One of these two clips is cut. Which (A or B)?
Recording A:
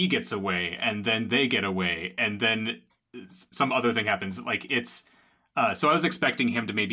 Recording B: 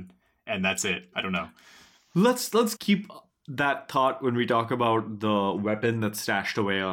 B